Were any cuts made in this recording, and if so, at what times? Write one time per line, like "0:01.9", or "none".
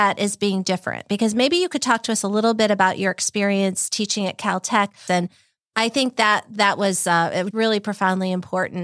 0:05.1
0:07.5